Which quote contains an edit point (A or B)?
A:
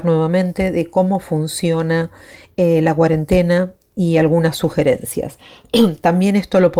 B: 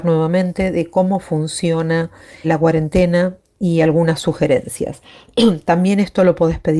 B